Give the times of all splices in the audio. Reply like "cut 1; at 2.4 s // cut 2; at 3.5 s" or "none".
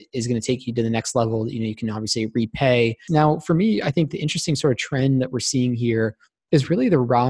cut 1; at 3.1 s